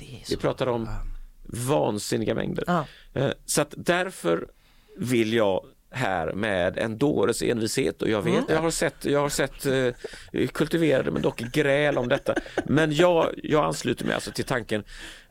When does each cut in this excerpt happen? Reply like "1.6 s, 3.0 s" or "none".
8.5 s